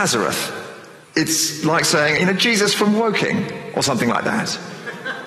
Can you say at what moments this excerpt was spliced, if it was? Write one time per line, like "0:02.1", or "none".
0:01.0
0:02.2